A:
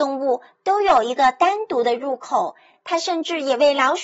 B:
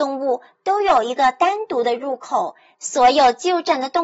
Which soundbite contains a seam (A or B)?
B